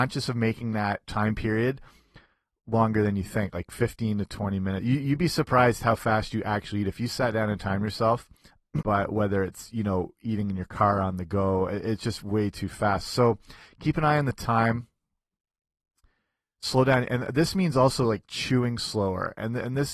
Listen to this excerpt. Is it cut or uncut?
cut